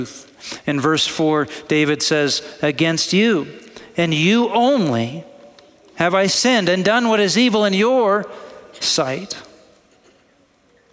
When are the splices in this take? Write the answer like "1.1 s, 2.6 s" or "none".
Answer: none